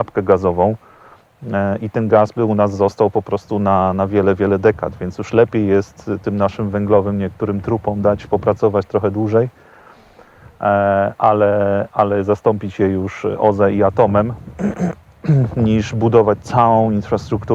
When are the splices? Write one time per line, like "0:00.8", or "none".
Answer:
none